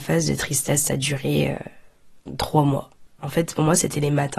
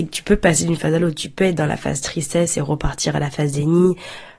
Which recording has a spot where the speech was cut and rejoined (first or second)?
first